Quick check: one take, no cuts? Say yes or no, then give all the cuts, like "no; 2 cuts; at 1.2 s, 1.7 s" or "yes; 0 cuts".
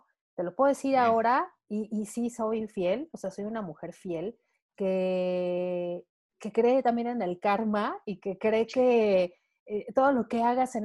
yes; 0 cuts